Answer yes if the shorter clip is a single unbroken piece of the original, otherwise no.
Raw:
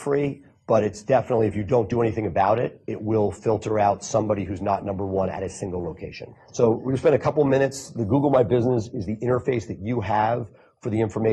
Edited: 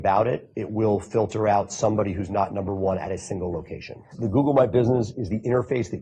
no